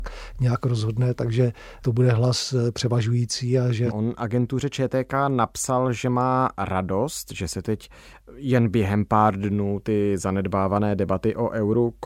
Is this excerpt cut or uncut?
cut